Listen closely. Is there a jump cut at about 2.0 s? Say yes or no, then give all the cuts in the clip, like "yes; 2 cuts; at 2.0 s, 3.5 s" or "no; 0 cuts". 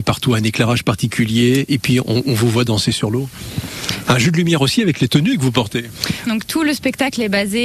no; 2 cuts; at 4.0 s, 6.3 s